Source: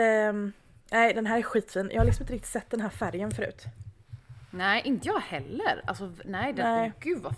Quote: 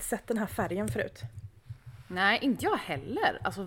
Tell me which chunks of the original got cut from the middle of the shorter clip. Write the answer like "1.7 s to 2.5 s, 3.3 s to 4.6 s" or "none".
none